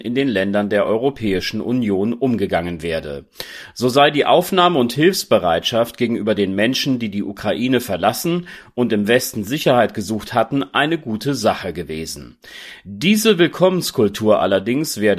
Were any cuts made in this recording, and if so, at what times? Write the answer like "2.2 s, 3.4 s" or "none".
none